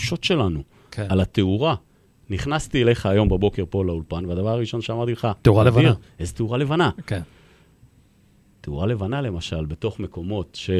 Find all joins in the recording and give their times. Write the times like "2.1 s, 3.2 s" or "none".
none